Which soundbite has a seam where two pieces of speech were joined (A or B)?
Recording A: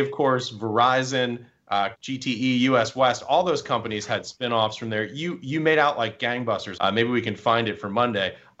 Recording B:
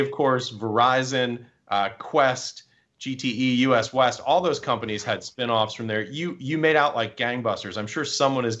A